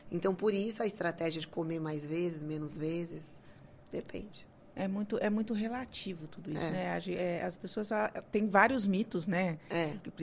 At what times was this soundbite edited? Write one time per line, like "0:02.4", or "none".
none